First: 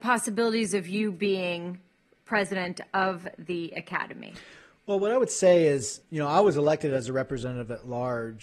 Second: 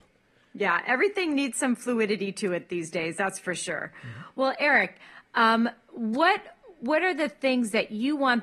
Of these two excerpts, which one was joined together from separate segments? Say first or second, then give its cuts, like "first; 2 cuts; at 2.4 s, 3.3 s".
first; 1 cut; at 6.0 s